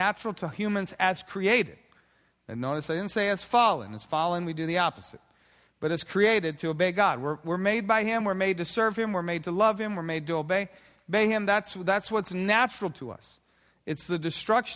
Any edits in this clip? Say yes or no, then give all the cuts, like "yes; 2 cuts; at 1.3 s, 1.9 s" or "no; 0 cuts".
no; 0 cuts